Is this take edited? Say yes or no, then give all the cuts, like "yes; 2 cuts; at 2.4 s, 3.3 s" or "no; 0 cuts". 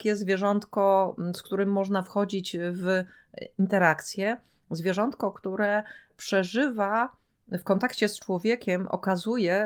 no; 0 cuts